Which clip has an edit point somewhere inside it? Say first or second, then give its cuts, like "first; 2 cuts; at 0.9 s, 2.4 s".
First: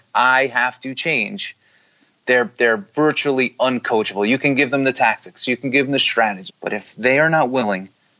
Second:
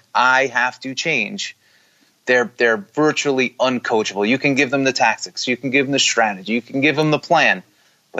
first; 1 cut; at 6.5 s